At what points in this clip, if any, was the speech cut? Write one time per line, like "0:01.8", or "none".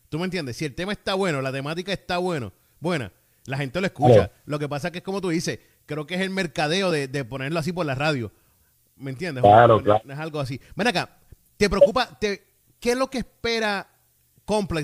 none